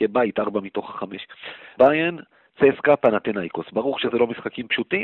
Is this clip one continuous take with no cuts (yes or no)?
no